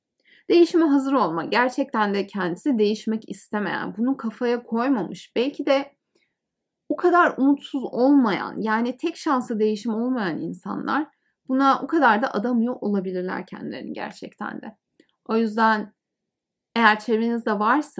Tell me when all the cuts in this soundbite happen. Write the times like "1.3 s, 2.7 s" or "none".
none

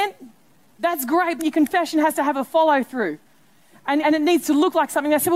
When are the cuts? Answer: 1.4 s, 4.0 s

